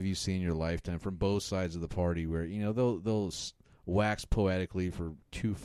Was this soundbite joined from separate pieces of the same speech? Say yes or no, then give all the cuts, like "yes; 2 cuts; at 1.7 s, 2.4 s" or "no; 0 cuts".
no; 0 cuts